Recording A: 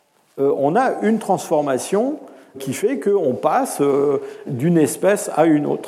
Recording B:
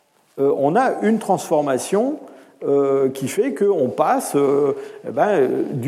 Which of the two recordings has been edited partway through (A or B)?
A